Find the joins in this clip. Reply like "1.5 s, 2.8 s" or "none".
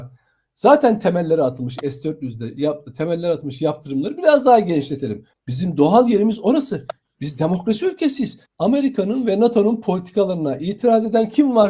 5.3 s, 8.5 s